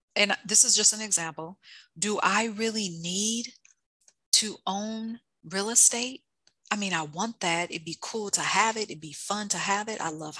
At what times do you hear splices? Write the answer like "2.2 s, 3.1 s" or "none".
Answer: none